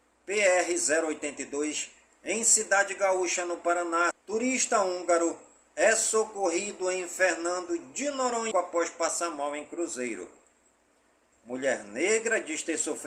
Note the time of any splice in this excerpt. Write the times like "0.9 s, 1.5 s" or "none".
4.1 s, 8.5 s, 11.3 s

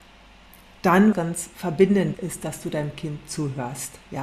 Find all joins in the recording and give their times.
1.1 s, 2.1 s

